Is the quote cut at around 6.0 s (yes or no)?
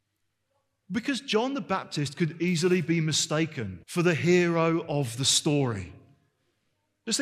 no